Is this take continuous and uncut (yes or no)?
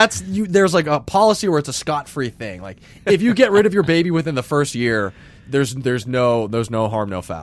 yes